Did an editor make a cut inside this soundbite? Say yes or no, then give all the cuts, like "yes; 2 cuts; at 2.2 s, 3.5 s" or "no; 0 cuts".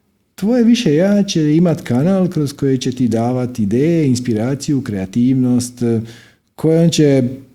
no; 0 cuts